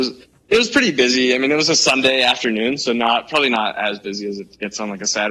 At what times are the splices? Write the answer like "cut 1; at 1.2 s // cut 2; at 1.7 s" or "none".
none